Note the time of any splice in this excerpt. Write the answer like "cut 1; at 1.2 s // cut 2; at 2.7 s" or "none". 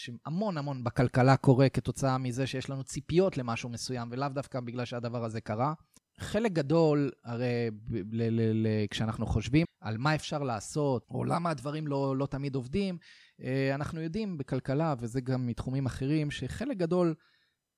cut 1; at 6.0 s // cut 2; at 9.6 s // cut 3; at 11.0 s